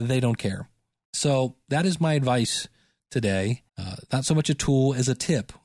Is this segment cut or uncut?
cut